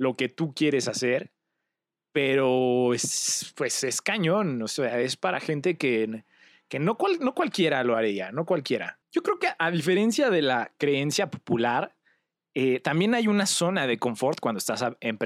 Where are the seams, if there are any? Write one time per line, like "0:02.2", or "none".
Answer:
none